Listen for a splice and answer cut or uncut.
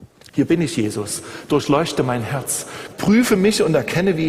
cut